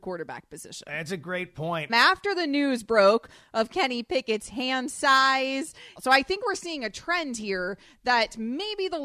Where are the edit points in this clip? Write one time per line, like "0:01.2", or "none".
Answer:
0:01.9
0:06.0